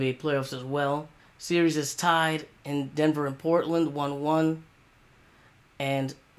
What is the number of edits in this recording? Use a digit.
1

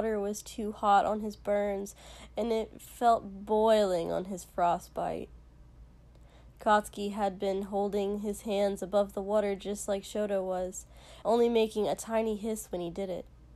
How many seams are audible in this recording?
1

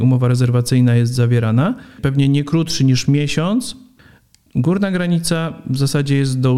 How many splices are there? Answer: 1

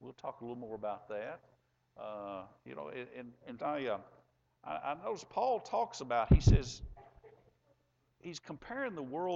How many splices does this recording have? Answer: 1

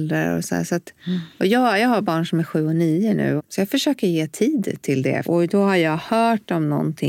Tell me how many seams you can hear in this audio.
2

